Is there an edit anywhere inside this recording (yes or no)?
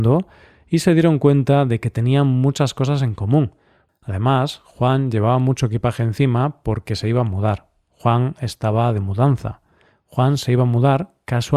yes